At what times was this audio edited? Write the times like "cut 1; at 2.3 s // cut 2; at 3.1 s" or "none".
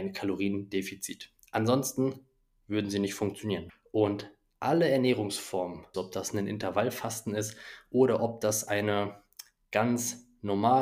cut 1; at 3.7 s // cut 2; at 5.9 s